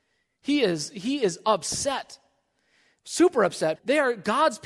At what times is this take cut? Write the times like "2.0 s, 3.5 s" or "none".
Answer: 3.8 s